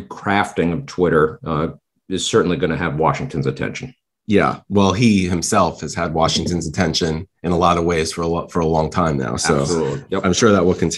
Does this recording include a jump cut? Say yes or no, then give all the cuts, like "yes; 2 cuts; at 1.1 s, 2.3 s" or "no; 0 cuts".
no; 0 cuts